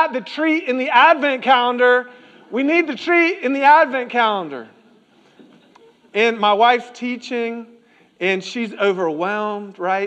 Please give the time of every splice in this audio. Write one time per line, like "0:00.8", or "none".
none